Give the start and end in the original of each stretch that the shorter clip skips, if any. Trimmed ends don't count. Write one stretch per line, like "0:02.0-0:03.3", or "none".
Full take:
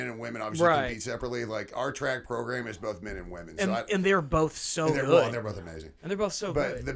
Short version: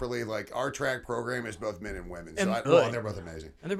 0:03.9-0:05.0